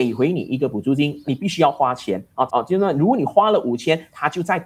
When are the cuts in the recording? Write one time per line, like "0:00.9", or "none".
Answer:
0:01.2
0:02.5